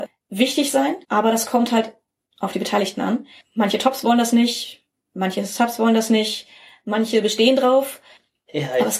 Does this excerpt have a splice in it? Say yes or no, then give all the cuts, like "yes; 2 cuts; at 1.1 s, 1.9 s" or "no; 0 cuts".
yes; 1 cut; at 1.0 s